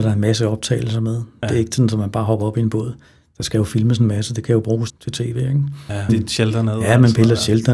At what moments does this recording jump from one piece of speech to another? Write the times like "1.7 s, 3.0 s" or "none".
4.9 s, 6.1 s